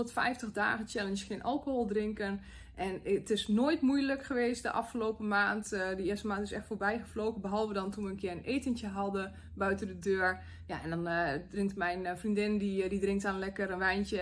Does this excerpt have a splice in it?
no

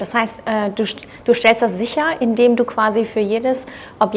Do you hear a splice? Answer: no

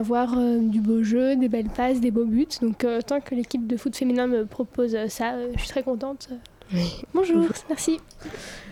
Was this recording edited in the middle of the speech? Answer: yes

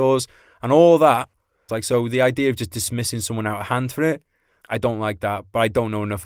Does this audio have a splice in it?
yes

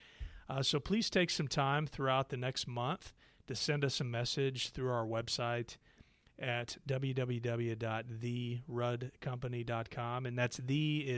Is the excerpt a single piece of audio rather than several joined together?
yes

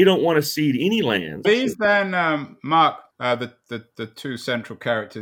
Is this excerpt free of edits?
no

